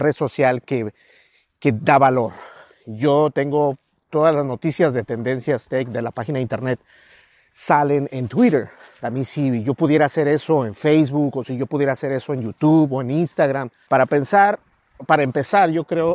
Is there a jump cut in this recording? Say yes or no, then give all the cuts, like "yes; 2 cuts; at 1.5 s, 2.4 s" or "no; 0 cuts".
yes; 3 cuts; at 4.1 s, 9.0 s, 13.8 s